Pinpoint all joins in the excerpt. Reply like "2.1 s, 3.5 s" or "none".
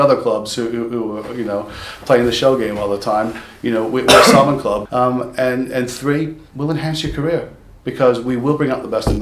4.9 s, 6.5 s